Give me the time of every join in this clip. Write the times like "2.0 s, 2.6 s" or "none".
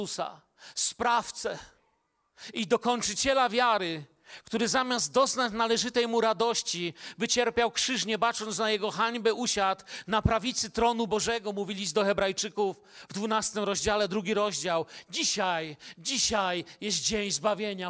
none